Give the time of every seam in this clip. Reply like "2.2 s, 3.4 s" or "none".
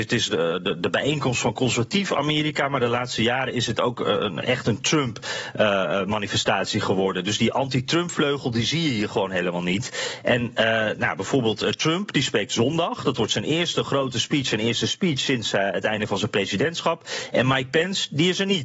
none

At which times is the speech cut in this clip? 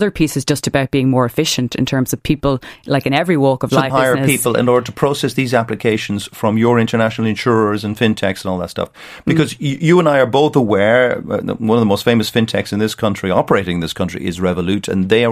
3.9 s

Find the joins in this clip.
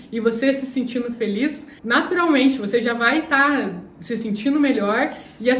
1.8 s

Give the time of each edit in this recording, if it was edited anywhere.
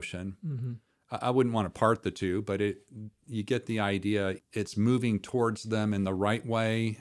4.4 s

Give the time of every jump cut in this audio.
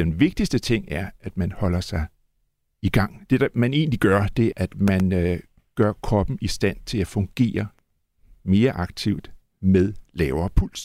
3.3 s, 4.5 s

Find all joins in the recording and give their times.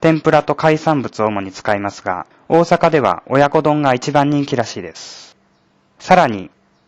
none

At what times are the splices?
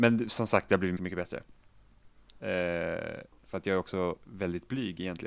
1.0 s, 2.4 s

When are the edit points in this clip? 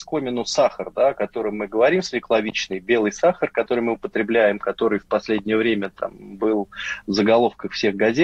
none

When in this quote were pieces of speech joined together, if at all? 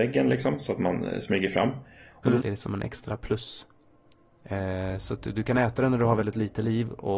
2.4 s

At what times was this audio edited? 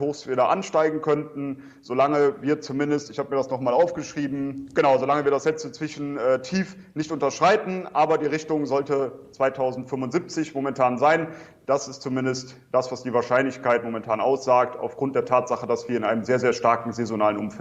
none

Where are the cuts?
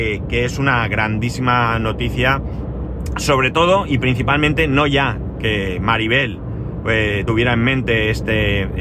none

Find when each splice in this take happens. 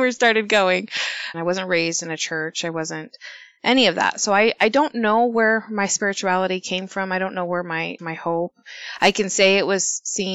1.3 s, 8.0 s

